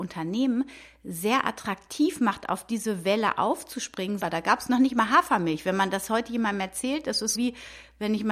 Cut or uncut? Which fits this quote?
cut